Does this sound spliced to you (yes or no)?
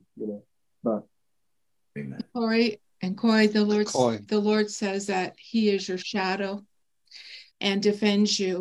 yes